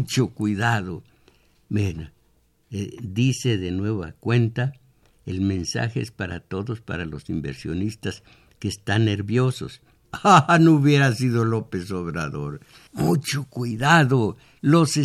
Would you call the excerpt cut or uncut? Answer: cut